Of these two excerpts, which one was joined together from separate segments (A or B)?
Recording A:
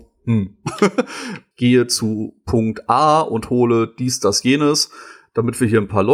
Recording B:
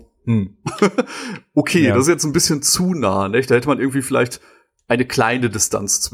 A